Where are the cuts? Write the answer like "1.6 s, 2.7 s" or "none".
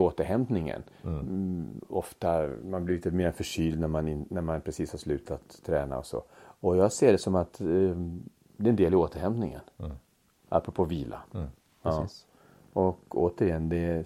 none